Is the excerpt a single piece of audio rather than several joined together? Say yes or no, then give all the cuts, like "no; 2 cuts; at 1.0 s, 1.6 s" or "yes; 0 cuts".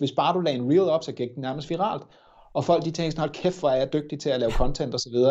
yes; 0 cuts